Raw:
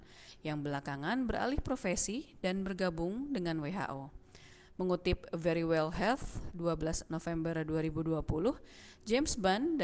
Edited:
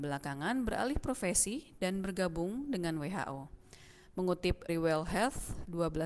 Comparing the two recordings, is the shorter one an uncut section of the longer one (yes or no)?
no